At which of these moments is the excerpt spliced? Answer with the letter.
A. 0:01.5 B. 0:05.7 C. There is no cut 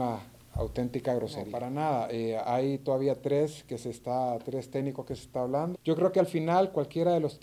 B